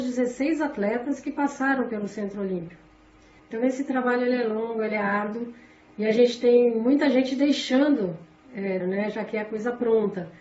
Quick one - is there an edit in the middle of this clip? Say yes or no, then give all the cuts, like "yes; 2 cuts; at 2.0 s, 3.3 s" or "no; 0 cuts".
yes; 2 cuts; at 3.4 s, 8.8 s